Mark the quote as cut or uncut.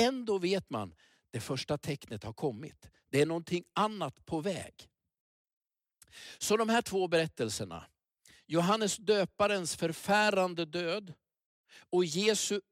uncut